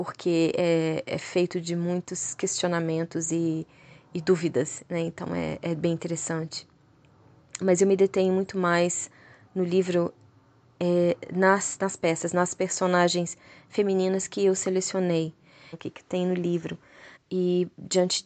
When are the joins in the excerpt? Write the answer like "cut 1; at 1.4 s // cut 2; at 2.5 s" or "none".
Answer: cut 1; at 15.7 s // cut 2; at 17.1 s

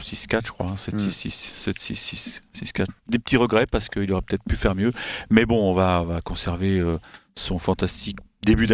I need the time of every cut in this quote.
cut 1; at 3.0 s

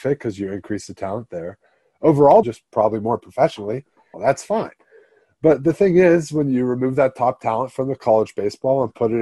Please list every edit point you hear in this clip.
cut 1; at 2.4 s // cut 2; at 4.1 s

